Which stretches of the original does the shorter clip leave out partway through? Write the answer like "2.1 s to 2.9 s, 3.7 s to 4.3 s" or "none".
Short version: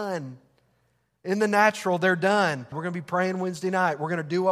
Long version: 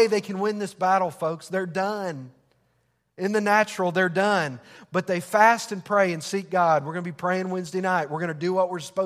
4.7 s to 6.8 s